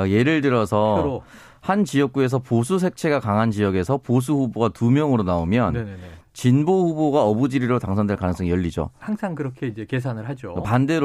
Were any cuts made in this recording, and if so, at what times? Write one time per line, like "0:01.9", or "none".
none

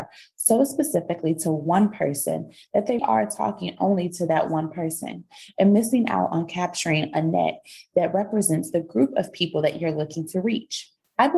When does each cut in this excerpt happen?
0:03.0

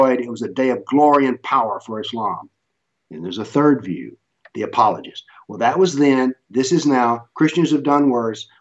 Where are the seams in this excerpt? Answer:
none

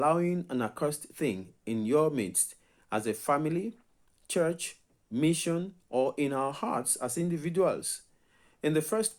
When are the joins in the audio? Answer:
none

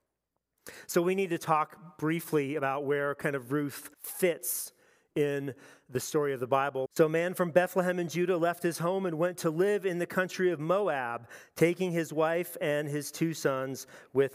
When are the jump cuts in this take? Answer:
0:03.9
0:06.9

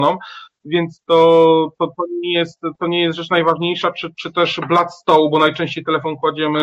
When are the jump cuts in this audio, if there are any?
none

